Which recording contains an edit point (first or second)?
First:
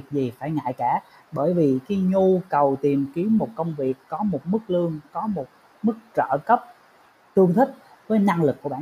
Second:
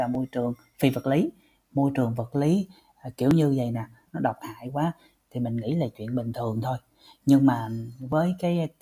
second